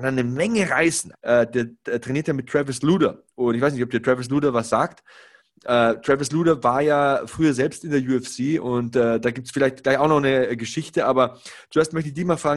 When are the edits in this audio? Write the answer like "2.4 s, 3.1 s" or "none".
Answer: 1.1 s